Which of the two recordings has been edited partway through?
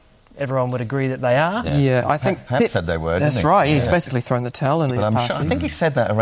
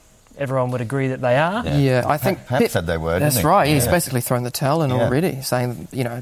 first; 1 cut; at 4.9 s

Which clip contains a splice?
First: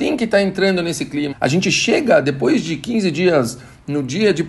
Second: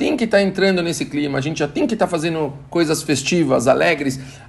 first; 1 cut; at 1.3 s

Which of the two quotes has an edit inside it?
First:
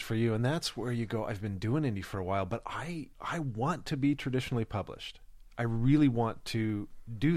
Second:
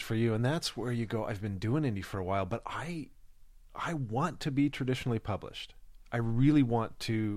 first; 1 cut; at 3.1 s

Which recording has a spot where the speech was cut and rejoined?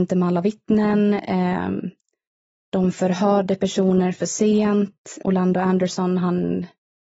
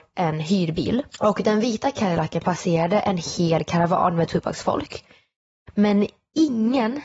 second; 1 cut; at 1.1 s

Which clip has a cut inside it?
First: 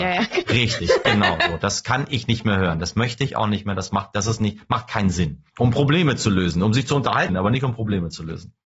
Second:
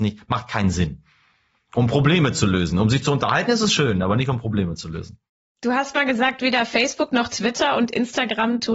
first; 2 cuts; at 5.5 s, 7.3 s

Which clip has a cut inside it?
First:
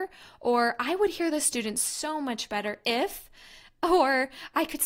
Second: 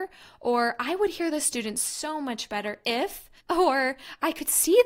second; 1 cut; at 3.4 s

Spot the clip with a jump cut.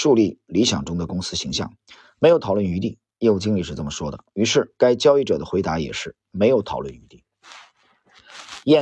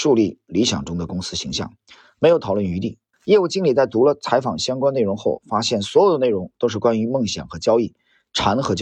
second; 1 cut; at 3.1 s

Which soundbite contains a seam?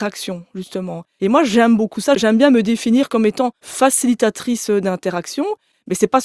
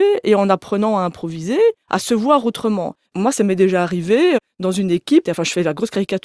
second; 3 cuts; at 1.8 s, 3.0 s, 5.2 s

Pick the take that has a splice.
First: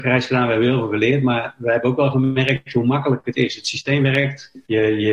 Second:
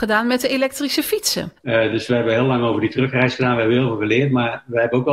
second; 1 cut; at 1.6 s

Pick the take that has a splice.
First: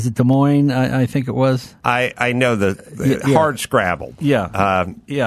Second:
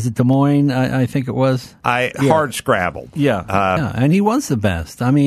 second; 2 cuts; at 2.1 s, 3.8 s

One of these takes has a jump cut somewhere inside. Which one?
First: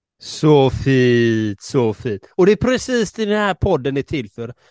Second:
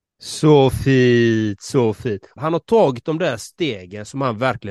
second; 1 cut; at 2.4 s

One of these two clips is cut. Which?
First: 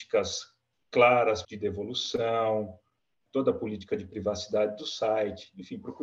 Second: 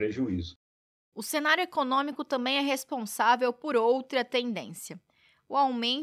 first; 1 cut; at 1.4 s

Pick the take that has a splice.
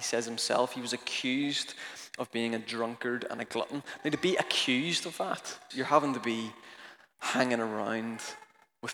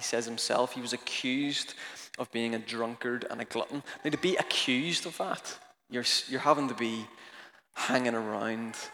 first; 1 cut; at 5.7 s

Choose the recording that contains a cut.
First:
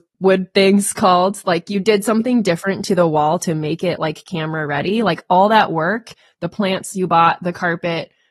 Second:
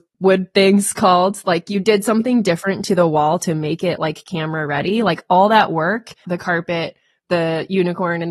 second; 1 cut; at 6.2 s

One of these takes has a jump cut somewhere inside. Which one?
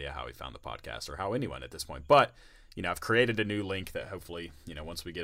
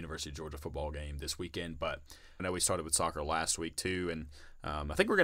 second; 1 cut; at 2.4 s

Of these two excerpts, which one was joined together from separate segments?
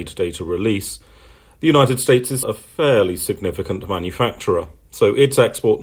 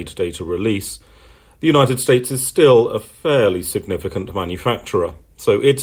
first; 1 cut; at 2.4 s

